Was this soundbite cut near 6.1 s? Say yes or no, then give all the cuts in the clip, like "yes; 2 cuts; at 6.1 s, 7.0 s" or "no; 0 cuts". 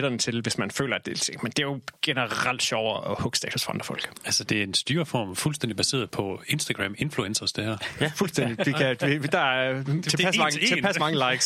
yes; 2 cuts; at 2.0 s, 6.1 s